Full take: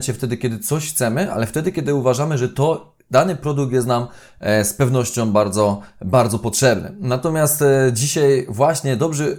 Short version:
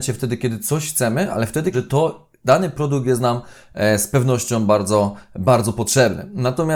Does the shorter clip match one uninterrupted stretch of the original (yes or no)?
no